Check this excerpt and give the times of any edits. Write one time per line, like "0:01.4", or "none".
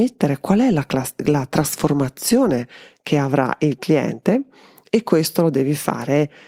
none